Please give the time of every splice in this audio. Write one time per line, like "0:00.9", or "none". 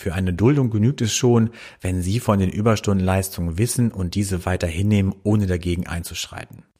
none

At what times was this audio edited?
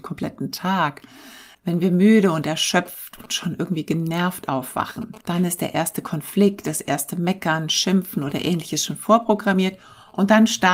0:01.5
0:05.2

